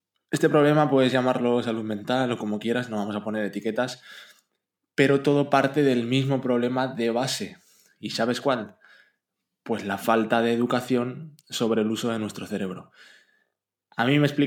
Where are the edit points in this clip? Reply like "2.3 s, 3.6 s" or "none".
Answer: none